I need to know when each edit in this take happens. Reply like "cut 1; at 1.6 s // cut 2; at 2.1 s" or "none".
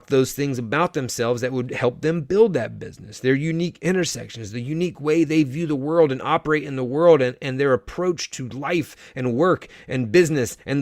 none